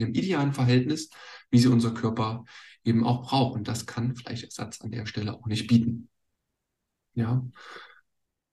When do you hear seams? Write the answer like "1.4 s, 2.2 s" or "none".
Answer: none